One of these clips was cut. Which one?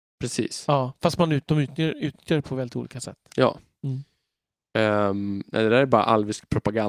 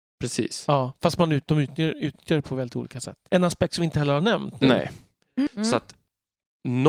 second; 2 cuts; at 3.3 s, 5.5 s

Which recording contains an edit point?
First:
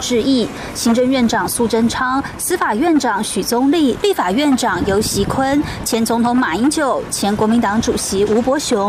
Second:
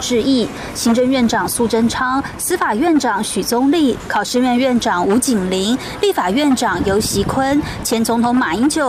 first; 1 cut; at 4.0 s

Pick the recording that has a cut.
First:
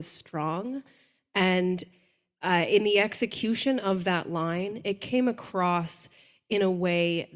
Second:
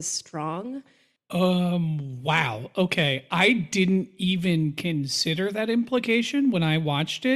second; 1 cut; at 1.2 s

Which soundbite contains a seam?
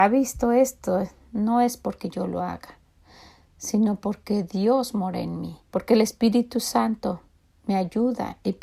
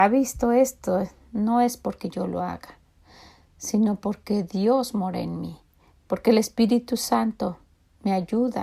first; 1 cut; at 5.6 s

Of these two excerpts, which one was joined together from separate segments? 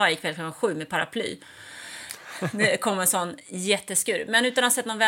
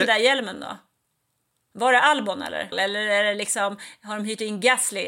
second; 1 cut; at 2.7 s

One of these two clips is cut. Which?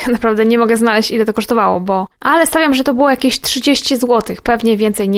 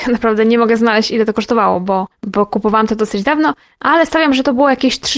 first; 1 cut; at 2.1 s

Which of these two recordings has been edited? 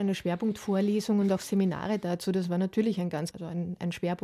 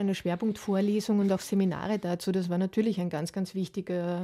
first; 1 cut; at 3.3 s

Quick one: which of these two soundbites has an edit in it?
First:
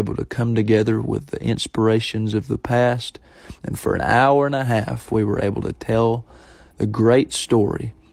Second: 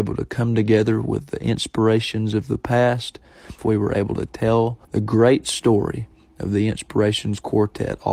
second; 2 cuts; at 3.6 s, 4.8 s

